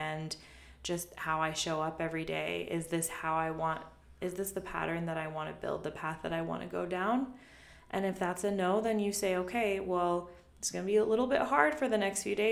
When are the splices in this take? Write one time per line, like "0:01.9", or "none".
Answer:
none